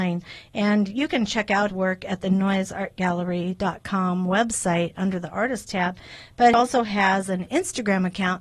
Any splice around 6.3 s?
no; 0 cuts

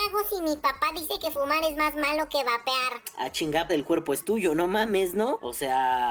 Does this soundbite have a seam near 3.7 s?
yes; 1 cut; at 3.7 s

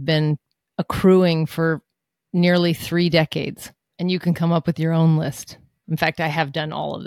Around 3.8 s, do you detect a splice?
no; 1 cut; at 5.8 s

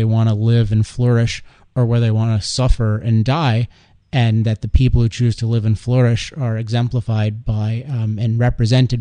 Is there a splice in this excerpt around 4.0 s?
no; 0 cuts

